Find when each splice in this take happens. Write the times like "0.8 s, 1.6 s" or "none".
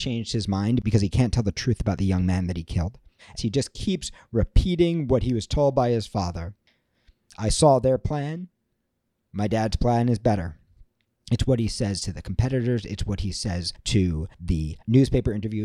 3.4 s